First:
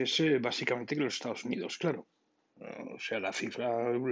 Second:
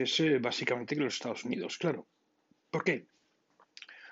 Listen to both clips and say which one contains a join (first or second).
first